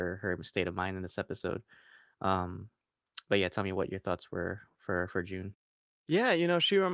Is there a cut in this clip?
no; 0 cuts

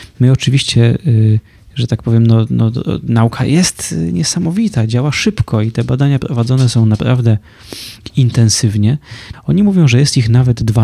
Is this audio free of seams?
no; 1 cut; at 9.3 s

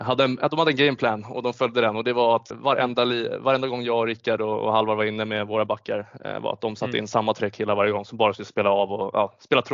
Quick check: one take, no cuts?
no; 1 cut; at 2.5 s

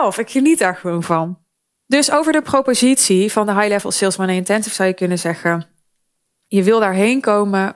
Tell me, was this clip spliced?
no; 0 cuts

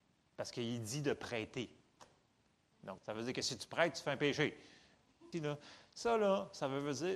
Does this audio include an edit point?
yes; 2 cuts; at 3.0 s, 5.3 s

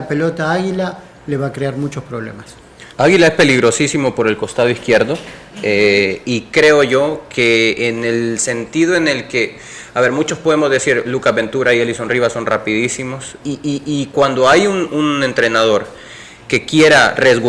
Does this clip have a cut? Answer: yes; 3 cuts; at 2.9 s, 13.4 s, 14.9 s

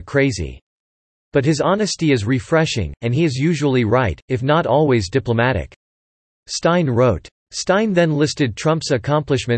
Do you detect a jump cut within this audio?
no; 0 cuts

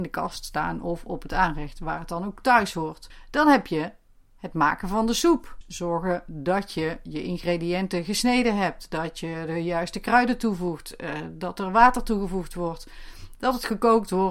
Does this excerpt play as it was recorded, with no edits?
yes; 0 cuts

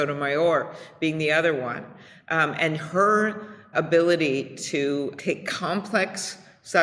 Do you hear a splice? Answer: yes; 2 cuts; at 3.7 s, 5.2 s

